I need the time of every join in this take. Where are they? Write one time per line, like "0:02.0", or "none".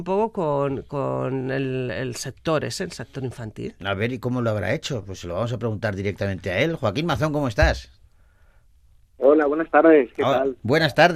none